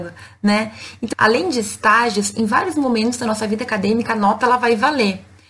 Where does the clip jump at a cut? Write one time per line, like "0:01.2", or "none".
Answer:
0:01.1